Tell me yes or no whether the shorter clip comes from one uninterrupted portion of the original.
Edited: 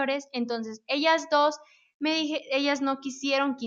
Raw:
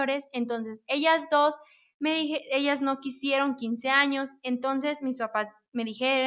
yes